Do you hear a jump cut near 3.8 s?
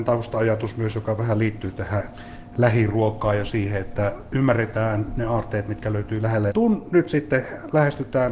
no; 1 cut; at 6.5 s

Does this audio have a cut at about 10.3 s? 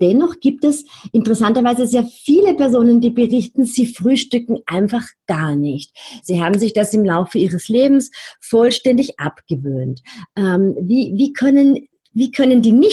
no; 1 cut; at 6.2 s

